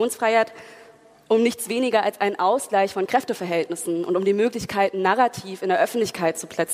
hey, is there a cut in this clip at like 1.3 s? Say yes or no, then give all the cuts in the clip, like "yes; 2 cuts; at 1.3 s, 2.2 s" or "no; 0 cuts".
no; 0 cuts